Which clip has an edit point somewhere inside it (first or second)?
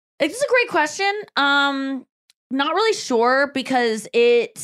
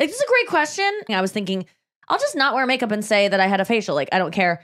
second